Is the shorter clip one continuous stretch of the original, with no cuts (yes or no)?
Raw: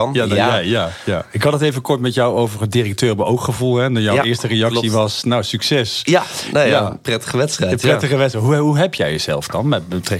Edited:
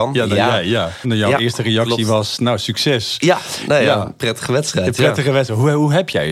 no